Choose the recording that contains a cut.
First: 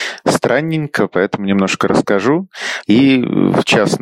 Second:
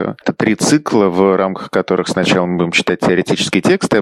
first; 1 cut; at 2.8 s

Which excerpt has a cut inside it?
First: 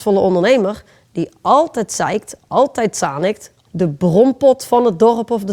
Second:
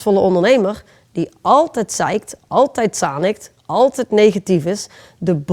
first; 1 cut; at 3.7 s

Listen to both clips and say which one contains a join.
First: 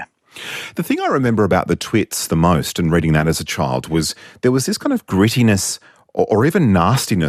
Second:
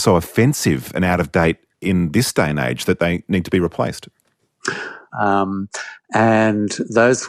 second; 1 cut; at 5.1 s

